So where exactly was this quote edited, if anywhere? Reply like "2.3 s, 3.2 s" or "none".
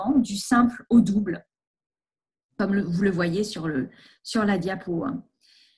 none